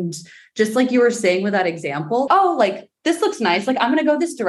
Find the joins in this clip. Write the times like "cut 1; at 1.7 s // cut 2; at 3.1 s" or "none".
cut 1; at 2.3 s